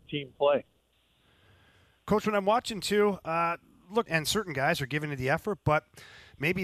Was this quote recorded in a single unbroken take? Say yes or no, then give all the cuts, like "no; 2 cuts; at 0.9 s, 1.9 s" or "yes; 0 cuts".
no; 1 cut; at 4.1 s